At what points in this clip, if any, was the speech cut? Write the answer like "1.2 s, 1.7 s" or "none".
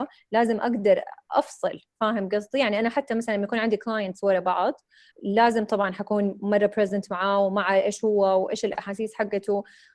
5.1 s